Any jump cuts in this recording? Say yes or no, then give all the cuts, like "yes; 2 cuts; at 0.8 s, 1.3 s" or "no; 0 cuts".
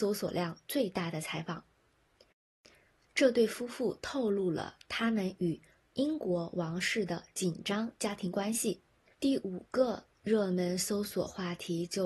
yes; 1 cut; at 9.1 s